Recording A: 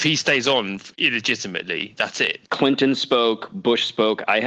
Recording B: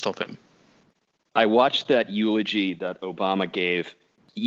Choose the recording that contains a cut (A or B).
A